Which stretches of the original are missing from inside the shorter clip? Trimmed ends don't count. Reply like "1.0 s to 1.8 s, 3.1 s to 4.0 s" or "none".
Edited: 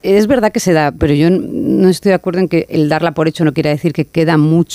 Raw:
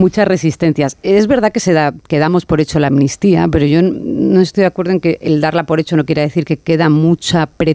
2.0 s to 3.5 s